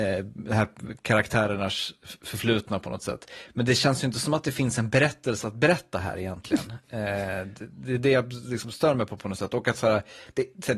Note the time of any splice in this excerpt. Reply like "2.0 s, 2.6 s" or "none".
none